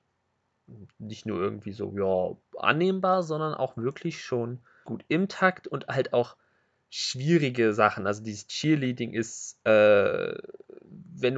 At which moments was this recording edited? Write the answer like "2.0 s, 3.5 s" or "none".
4.8 s